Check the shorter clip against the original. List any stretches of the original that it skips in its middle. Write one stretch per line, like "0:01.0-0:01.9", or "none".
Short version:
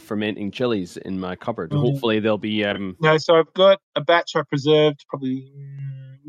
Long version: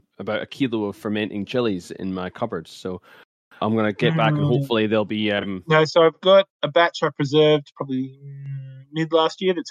0:02.6-0:04.4